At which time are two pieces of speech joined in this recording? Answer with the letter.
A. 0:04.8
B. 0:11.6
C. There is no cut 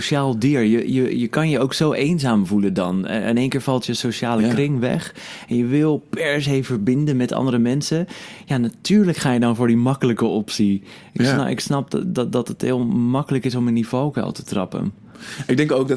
C